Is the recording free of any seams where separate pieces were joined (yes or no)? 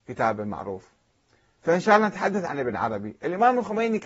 yes